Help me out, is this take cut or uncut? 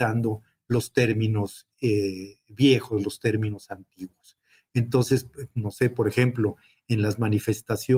uncut